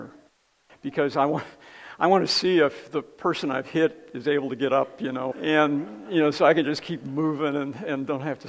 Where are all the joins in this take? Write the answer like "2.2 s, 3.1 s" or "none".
5.3 s

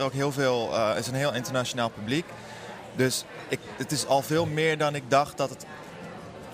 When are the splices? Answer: none

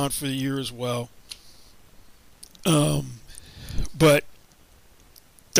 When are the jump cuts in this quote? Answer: 2.6 s

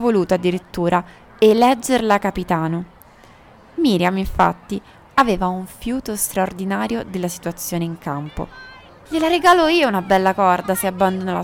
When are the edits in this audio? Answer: 5.1 s, 9.1 s

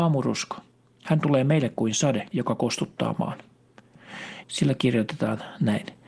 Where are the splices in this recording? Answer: 2.3 s, 4.4 s

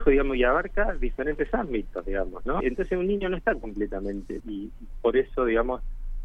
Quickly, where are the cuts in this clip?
2.6 s, 4.4 s

